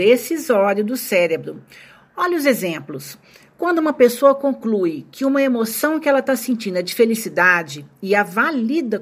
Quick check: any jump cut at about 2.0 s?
no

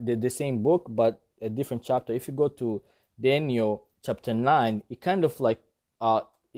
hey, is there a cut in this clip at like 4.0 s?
yes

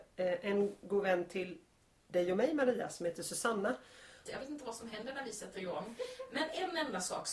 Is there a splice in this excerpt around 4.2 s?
yes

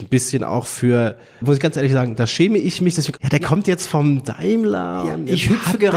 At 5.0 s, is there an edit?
no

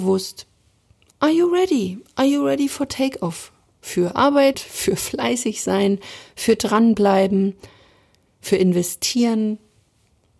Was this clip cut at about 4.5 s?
yes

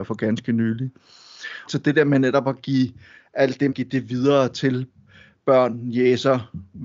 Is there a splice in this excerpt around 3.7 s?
yes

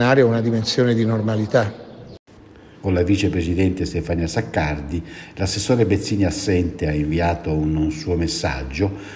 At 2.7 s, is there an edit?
yes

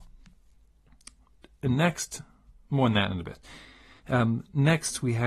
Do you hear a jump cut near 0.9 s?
no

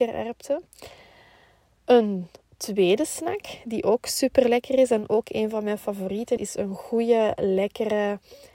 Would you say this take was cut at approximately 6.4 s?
yes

